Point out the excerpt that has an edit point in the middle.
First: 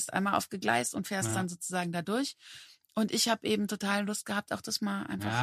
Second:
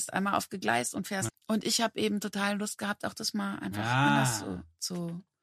second; 1 cut; at 1.3 s

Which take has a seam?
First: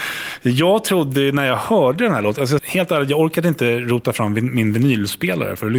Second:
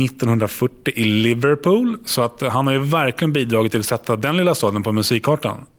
first; 1 cut; at 2.6 s

